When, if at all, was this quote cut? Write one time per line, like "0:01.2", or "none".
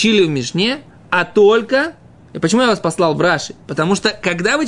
none